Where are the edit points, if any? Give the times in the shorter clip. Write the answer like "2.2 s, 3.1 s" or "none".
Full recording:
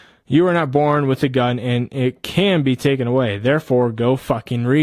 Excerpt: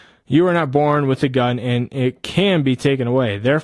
none